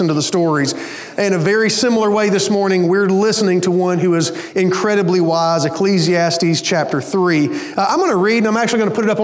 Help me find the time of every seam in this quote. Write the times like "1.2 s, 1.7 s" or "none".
none